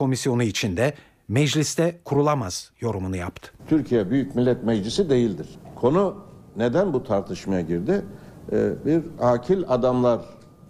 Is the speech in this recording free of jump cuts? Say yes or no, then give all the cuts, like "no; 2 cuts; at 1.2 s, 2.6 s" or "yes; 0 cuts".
no; 1 cut; at 3.6 s